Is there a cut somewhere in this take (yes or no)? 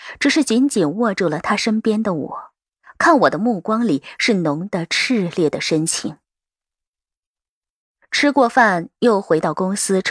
no